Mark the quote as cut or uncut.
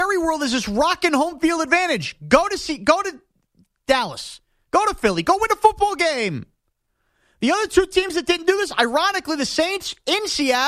uncut